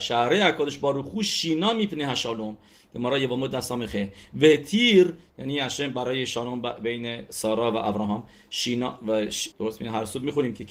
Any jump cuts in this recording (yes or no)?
yes